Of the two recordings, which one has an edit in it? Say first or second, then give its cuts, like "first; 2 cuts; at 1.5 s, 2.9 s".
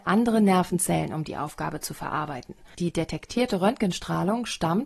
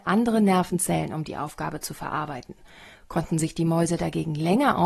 first; 1 cut; at 2.7 s